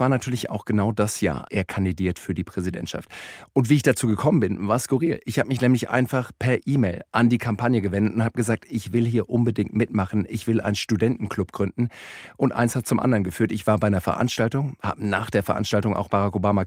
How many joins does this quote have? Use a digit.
1